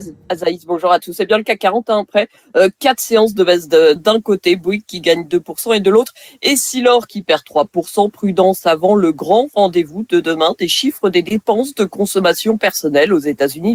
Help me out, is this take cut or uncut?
cut